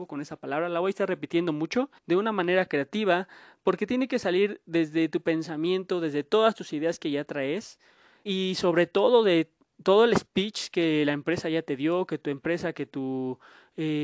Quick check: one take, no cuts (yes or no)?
no